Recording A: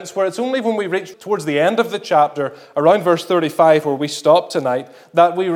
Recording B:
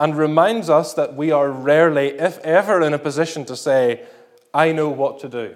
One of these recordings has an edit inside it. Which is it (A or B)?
A